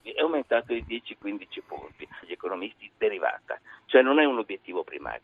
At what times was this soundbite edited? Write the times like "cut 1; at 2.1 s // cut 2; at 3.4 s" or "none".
cut 1; at 2.2 s